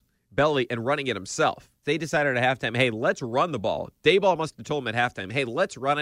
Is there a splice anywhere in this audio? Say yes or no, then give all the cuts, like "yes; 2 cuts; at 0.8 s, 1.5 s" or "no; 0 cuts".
yes; 1 cut; at 1.8 s